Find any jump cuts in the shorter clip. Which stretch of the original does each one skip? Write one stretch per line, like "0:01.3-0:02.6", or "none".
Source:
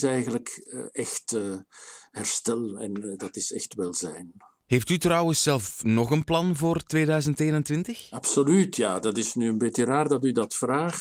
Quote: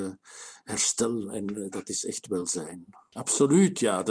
0:04.6-0:08.1